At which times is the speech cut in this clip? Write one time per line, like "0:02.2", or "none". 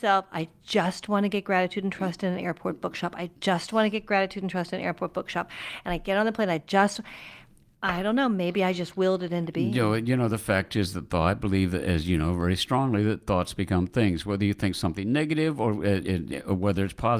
none